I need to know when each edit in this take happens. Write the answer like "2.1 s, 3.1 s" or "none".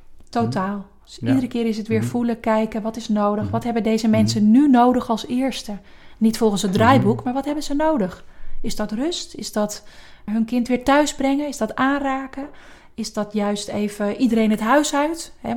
10.3 s